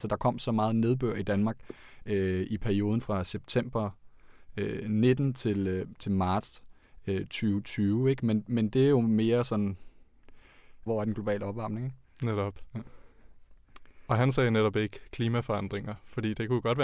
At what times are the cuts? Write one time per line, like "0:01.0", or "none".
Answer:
0:10.9